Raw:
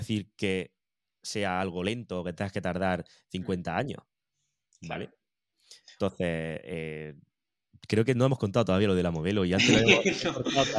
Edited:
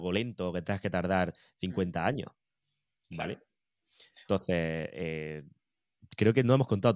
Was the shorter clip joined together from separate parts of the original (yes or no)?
no